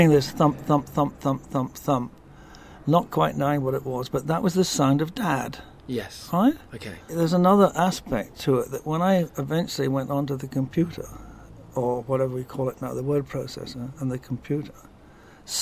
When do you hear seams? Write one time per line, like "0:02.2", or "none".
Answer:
none